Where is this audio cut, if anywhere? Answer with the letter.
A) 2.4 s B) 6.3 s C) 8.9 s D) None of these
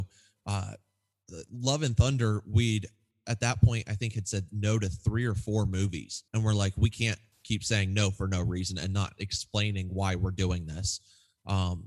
B